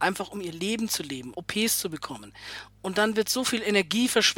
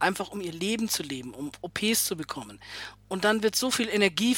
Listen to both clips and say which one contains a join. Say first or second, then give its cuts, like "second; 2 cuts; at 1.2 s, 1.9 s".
first; 1 cut; at 1.3 s